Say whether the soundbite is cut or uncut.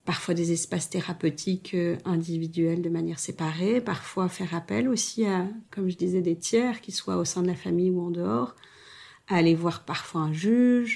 uncut